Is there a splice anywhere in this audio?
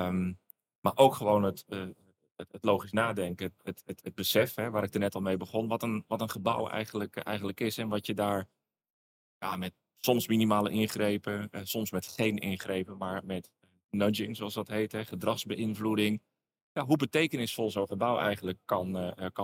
no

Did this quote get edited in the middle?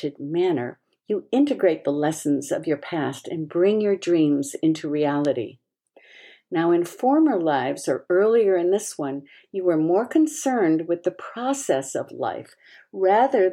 no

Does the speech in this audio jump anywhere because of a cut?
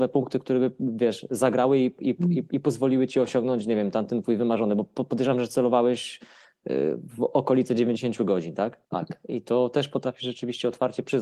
yes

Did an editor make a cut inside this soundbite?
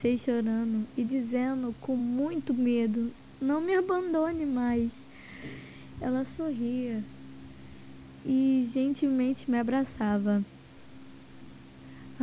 no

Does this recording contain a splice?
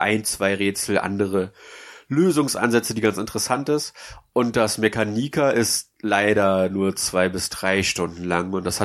no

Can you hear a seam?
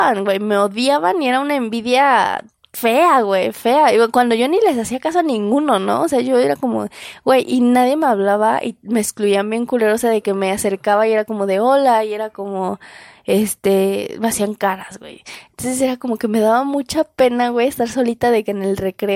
no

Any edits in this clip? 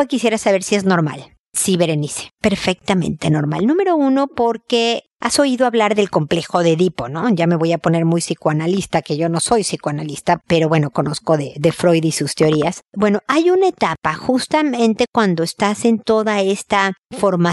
no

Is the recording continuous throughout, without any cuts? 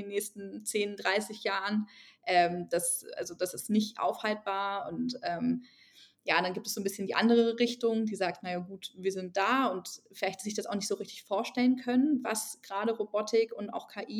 yes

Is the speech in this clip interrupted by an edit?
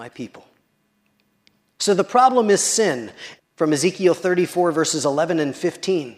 yes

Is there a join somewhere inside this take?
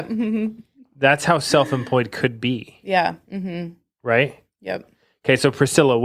yes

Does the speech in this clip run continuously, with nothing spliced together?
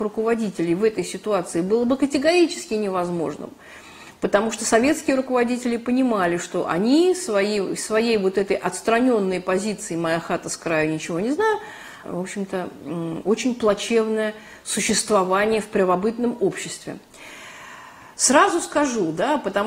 no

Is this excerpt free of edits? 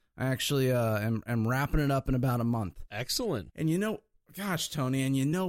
yes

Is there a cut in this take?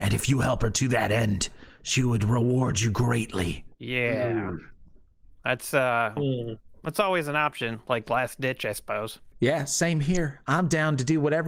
yes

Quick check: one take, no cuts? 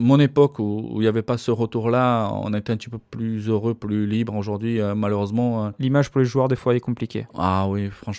yes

